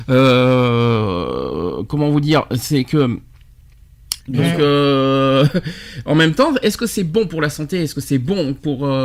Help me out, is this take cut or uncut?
cut